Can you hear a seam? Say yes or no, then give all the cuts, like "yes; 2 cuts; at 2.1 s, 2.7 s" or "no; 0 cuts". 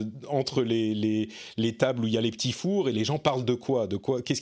no; 0 cuts